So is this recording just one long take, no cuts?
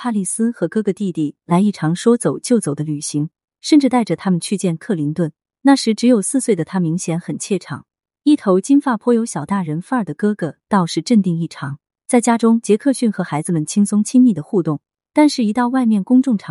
yes; 0 cuts

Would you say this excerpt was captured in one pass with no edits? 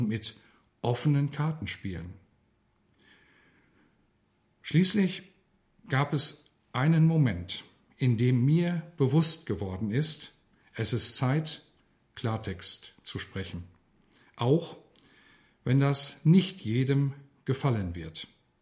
yes; 0 cuts

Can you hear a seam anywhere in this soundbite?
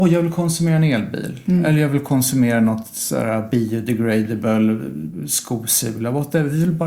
no; 0 cuts

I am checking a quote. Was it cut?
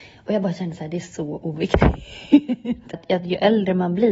yes; 1 cut; at 2.9 s

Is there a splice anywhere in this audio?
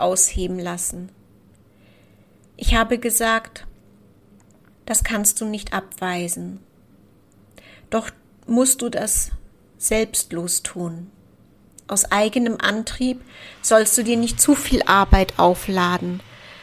yes; 1 cut; at 4.7 s

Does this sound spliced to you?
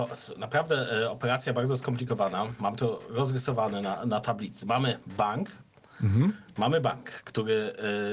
no; 0 cuts

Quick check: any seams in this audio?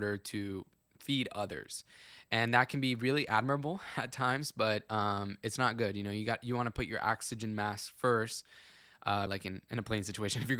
yes; 1 cut; at 9.3 s

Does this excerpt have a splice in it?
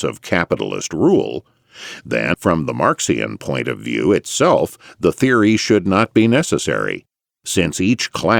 yes; 1 cut; at 2.3 s

